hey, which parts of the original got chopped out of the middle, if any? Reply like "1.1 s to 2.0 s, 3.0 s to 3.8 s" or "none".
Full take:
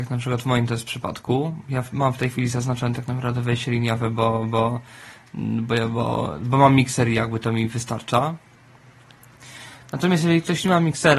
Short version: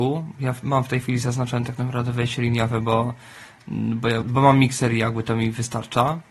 4.1 s to 4.5 s, 5.9 s to 6.4 s